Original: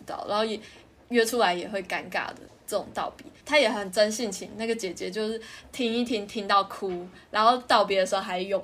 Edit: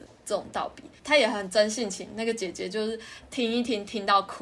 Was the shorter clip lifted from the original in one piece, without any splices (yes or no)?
yes